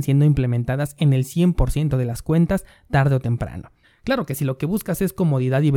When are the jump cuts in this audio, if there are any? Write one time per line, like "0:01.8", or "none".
0:03.8